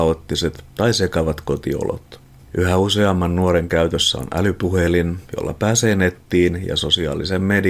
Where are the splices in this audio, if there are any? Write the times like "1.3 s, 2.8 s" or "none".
2.4 s